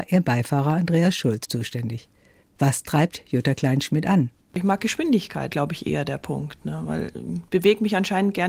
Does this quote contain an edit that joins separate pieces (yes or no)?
yes